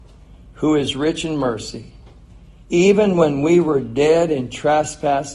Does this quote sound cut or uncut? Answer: cut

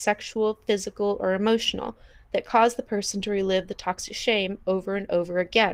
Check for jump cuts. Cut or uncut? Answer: uncut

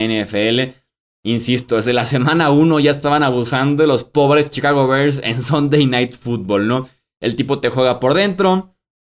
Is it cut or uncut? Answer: uncut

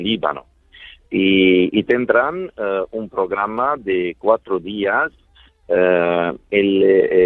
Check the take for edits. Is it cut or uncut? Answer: uncut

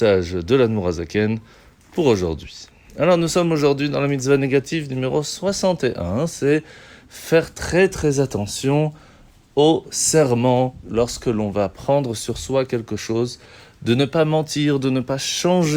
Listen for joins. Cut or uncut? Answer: cut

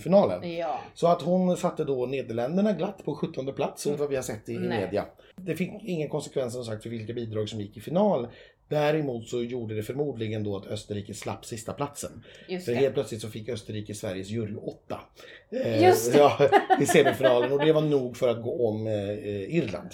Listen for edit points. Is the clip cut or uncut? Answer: cut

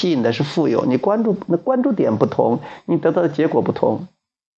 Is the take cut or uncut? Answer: uncut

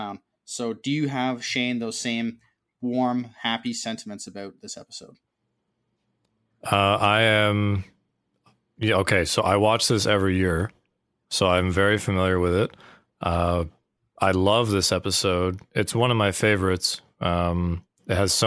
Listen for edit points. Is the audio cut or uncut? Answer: uncut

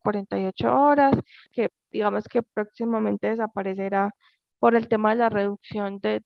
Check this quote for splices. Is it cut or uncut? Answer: cut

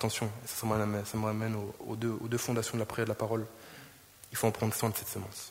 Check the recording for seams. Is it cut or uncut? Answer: uncut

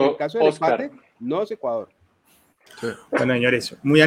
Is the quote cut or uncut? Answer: cut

